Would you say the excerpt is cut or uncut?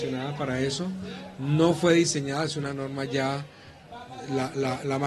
uncut